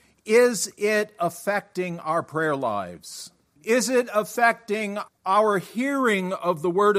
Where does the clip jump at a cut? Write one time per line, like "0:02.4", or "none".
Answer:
0:03.6
0:05.1